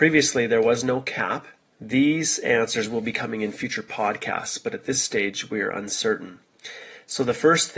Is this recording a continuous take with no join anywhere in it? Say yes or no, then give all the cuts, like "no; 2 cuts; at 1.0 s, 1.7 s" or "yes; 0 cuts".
no; 1 cut; at 1.7 s